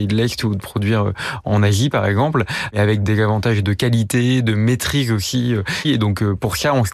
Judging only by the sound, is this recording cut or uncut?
cut